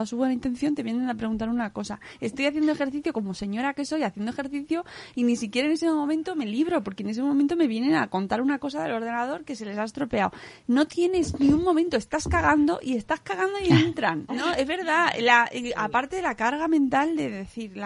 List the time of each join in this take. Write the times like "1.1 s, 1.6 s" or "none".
14.3 s